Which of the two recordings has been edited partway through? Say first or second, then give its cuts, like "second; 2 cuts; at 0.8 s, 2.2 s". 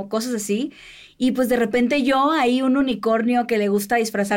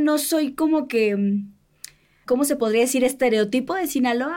second; 1 cut; at 2.3 s